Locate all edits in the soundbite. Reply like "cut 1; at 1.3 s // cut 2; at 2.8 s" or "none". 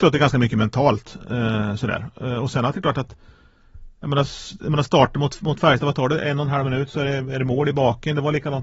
none